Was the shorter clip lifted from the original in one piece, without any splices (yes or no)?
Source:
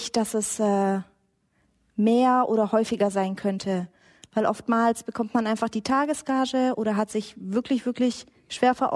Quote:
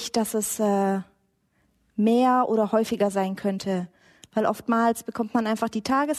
yes